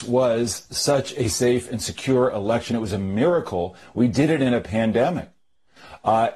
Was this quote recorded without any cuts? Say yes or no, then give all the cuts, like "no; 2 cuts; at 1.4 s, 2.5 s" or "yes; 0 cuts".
yes; 0 cuts